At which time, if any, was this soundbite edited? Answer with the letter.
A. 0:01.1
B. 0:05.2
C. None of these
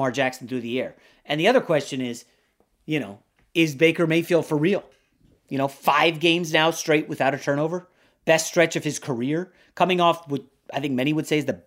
C